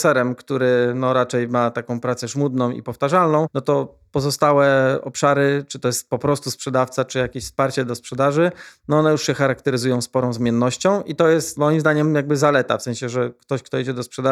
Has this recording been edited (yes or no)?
no